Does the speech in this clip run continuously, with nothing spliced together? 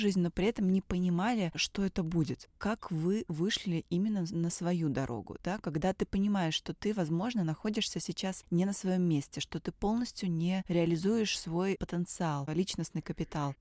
yes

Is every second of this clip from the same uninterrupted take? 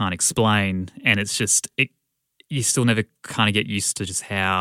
yes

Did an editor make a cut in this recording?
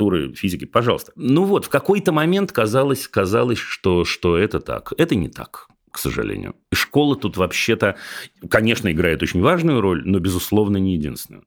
yes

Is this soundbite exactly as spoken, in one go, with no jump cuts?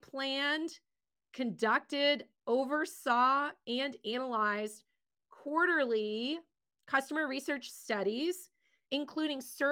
yes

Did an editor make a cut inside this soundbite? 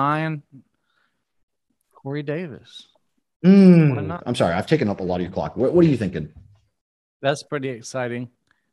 yes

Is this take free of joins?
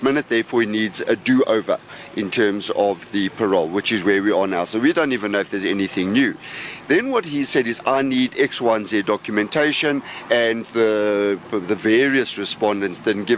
no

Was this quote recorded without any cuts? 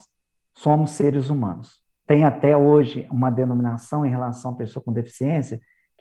no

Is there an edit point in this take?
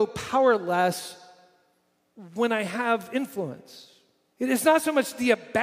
yes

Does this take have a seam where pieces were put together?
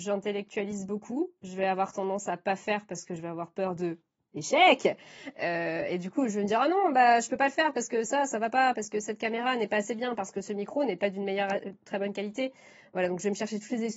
no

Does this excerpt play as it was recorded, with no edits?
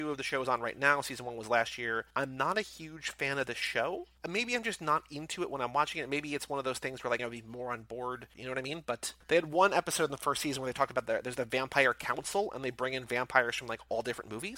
no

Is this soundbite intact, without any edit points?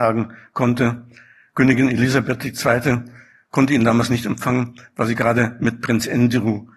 yes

